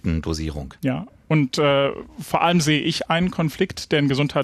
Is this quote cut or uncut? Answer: uncut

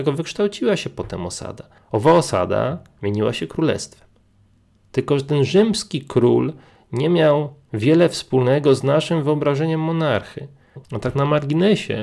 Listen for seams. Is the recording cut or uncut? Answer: cut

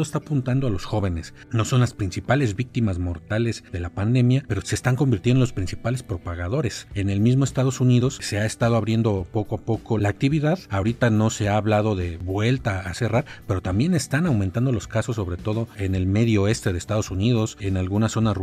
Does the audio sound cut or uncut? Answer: uncut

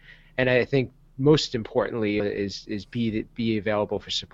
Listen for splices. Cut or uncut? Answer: cut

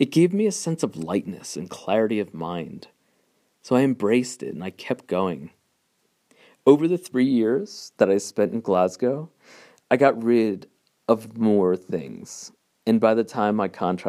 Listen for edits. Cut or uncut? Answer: uncut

